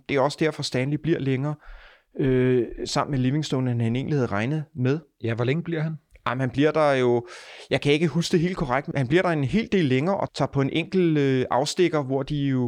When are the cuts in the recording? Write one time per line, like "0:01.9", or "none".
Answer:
0:08.9
0:10.3